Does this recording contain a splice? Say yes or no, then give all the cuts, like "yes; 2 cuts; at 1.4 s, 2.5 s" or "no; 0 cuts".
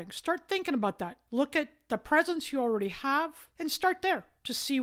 yes; 2 cuts; at 1.3 s, 3.6 s